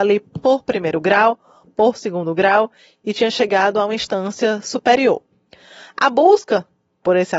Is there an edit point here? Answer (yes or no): no